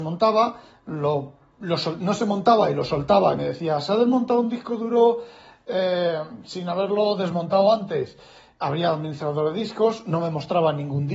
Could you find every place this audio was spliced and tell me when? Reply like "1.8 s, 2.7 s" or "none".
none